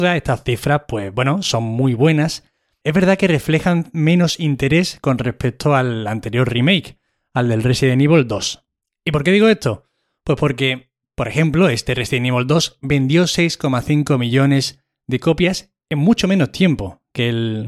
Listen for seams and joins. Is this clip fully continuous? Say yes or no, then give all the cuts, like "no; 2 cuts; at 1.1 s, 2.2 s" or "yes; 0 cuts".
yes; 0 cuts